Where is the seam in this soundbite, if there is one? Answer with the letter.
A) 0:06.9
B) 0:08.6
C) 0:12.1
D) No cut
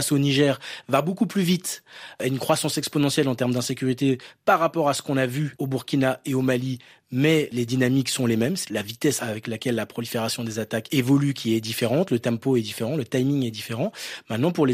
B